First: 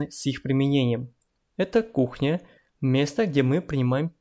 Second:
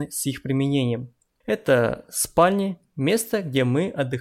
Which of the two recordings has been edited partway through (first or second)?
first